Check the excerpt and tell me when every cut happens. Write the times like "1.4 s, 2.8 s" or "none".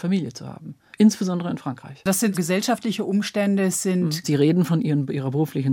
2.3 s, 4.2 s